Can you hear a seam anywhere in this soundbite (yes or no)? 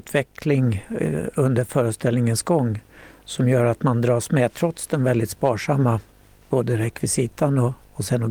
no